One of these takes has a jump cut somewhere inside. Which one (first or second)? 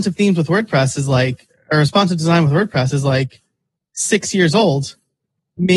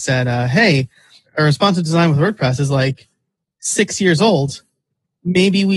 second